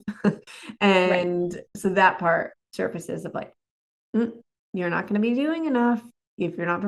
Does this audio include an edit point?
no; 0 cuts

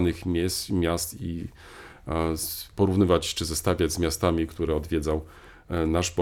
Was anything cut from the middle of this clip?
no; 0 cuts

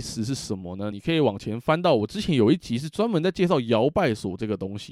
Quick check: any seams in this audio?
no; 0 cuts

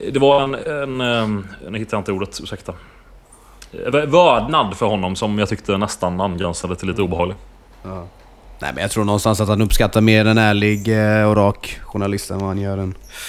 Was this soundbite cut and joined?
no; 0 cuts

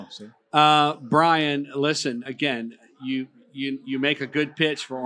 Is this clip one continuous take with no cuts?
no; 1 cut; at 2.3 s

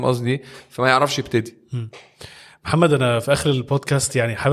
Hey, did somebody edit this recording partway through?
no; 0 cuts

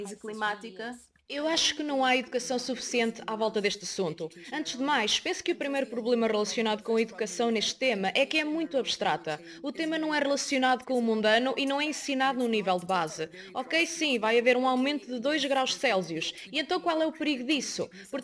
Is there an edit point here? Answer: no; 0 cuts

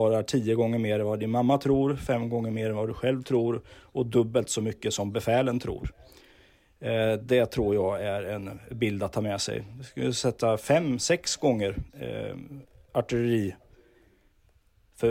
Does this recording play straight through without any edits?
yes; 0 cuts

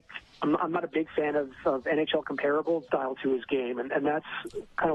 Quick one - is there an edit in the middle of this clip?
yes; 1 cut; at 2.9 s

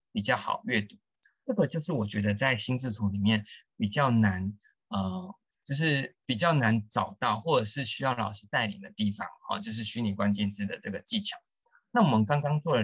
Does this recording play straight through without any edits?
yes; 0 cuts

